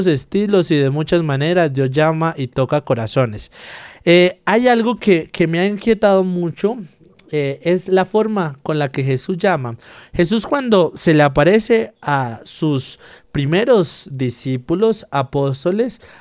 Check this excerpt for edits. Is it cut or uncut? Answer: uncut